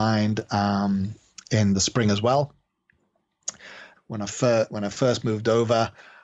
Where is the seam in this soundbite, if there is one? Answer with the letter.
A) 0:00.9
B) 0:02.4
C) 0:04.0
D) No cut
C